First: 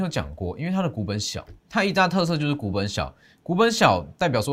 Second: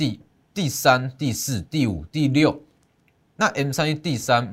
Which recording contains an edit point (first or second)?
first